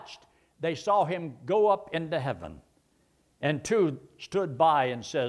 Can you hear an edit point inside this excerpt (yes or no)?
no